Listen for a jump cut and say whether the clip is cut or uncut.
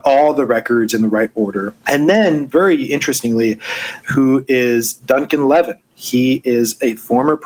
cut